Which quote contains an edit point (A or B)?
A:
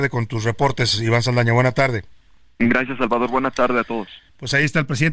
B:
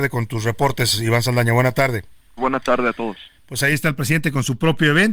B